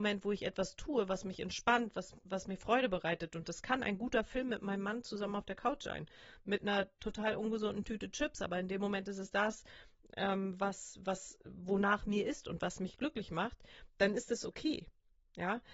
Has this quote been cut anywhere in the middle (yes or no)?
no